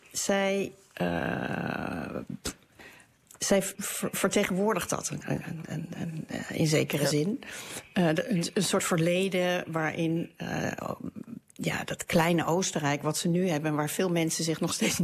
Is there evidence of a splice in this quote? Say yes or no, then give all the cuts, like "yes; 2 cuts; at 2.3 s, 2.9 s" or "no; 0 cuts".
yes; 1 cut; at 3.7 s